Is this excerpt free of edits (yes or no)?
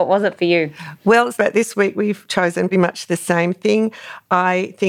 no